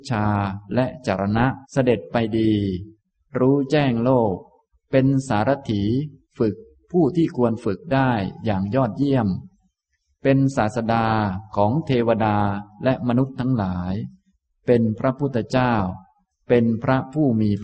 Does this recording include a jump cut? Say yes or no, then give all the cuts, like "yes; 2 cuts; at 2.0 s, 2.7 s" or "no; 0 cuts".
yes; 1 cut; at 1.6 s